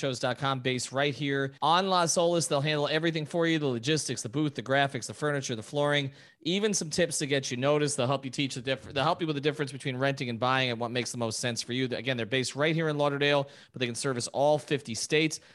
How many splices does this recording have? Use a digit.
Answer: 1